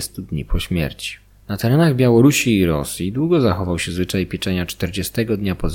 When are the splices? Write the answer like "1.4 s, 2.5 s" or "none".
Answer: 1.3 s